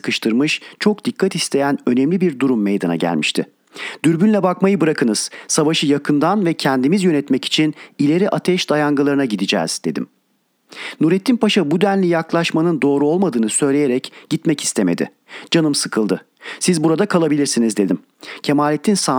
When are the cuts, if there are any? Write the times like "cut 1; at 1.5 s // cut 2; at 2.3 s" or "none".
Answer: none